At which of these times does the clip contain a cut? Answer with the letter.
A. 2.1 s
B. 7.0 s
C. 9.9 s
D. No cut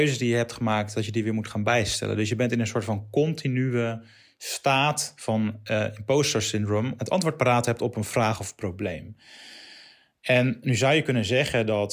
B